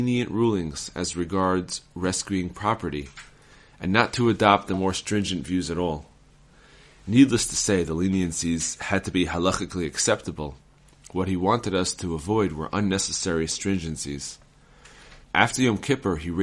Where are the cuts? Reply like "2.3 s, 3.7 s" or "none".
15.2 s